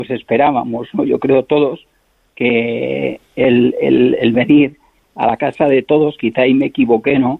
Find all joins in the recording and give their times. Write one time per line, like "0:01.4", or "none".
none